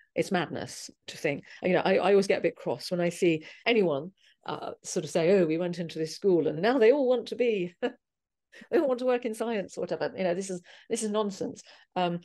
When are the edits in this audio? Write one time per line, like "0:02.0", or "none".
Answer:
none